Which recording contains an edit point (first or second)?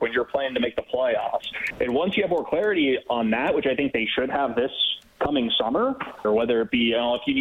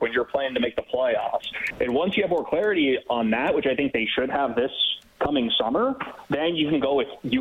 first